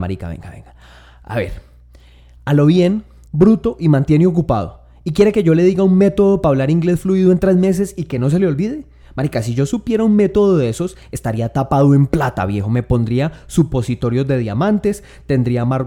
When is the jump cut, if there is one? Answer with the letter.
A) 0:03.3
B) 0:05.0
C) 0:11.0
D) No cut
A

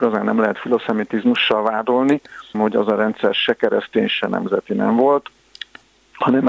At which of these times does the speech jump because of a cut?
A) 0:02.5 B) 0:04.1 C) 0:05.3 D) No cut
A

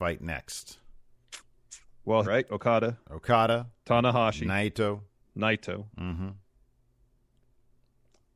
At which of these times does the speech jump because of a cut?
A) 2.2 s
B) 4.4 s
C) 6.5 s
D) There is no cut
A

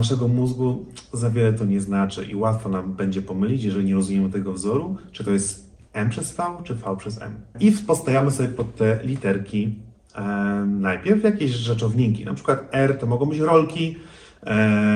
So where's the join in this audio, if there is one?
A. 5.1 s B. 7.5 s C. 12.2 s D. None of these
B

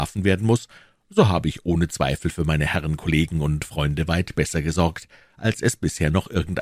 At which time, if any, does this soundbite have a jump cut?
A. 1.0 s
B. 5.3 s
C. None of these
C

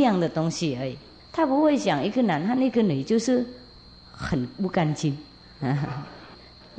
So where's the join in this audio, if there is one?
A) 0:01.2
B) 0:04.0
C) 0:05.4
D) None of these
A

